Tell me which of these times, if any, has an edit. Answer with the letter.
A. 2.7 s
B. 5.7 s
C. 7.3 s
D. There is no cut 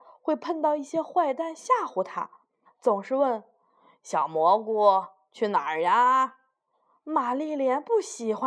A